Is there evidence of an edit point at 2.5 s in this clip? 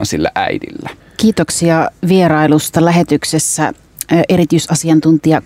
no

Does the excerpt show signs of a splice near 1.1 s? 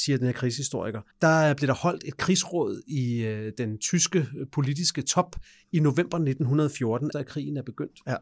yes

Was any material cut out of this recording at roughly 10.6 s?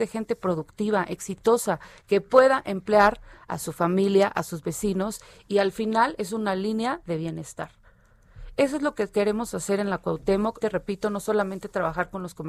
yes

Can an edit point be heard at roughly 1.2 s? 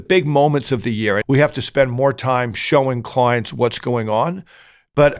yes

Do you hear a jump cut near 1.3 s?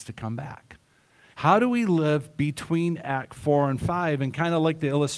yes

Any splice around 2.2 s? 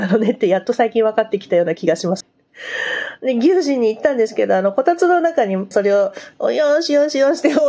yes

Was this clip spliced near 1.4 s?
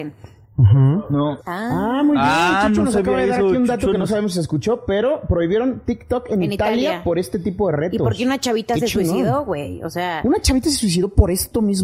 yes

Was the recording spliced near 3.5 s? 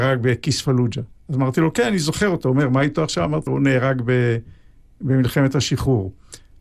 yes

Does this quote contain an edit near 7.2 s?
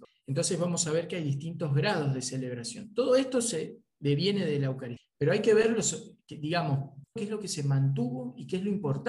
yes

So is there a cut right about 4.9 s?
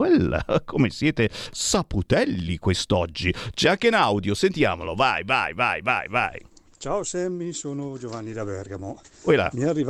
no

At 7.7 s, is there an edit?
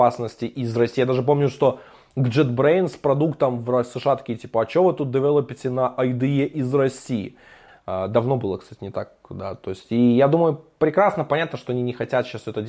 yes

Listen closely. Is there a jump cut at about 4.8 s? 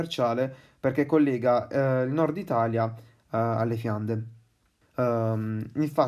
yes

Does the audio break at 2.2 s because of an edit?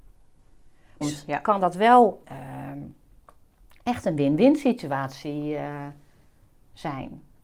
yes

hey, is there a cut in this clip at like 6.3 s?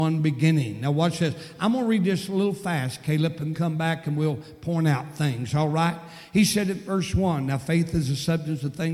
no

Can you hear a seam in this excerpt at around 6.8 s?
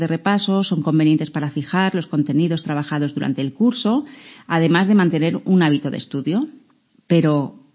no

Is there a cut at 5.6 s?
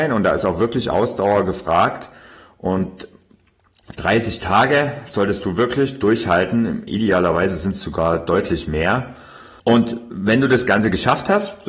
no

